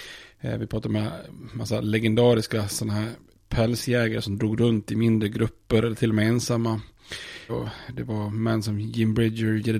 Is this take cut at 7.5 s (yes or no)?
yes